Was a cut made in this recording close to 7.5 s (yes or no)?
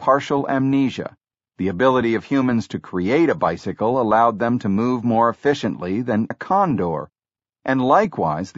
no